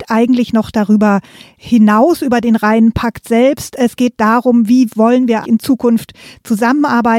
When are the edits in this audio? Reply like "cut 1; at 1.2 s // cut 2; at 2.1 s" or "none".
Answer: cut 1; at 5.4 s